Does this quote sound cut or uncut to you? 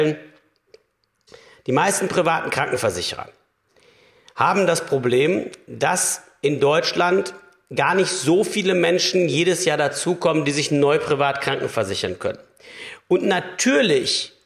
uncut